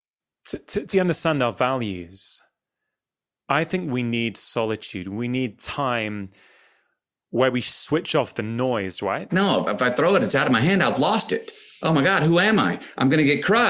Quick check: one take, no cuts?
no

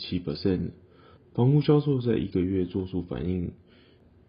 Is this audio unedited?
no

